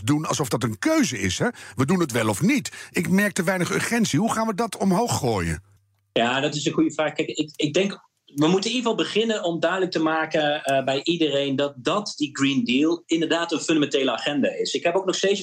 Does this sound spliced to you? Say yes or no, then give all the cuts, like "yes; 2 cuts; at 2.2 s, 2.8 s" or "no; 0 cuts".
no; 0 cuts